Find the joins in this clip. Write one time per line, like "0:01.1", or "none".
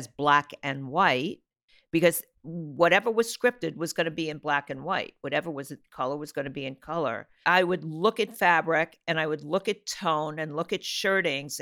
none